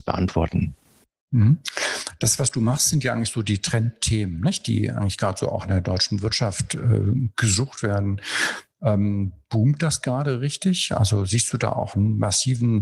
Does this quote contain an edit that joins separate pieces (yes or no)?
no